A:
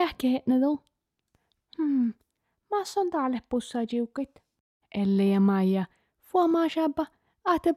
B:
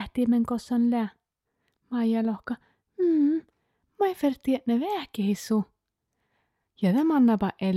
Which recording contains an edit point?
A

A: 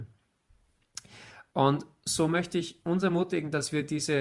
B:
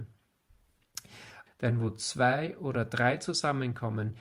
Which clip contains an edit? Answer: B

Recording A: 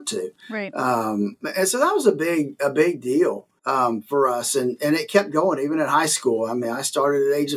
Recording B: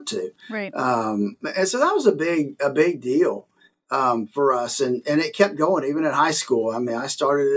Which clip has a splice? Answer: A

